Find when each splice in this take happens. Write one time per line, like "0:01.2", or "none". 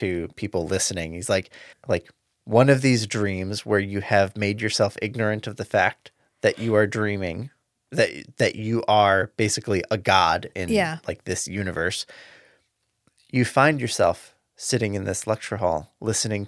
0:01.7